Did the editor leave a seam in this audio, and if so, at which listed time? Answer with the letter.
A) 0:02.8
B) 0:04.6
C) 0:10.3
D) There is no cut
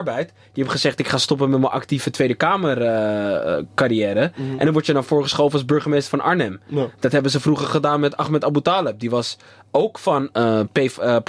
C